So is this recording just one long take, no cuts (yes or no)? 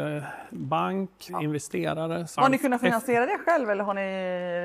no